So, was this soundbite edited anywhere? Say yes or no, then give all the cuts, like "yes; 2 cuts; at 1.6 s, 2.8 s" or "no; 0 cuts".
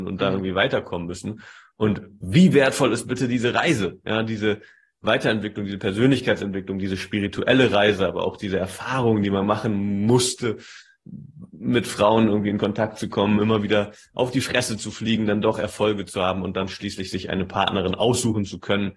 no; 0 cuts